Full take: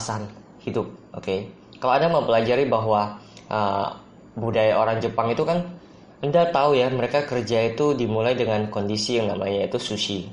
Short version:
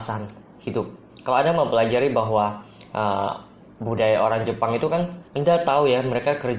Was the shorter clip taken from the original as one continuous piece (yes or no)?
no